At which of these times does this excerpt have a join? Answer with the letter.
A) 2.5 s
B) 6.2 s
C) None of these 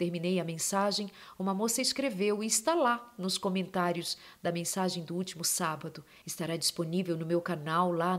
B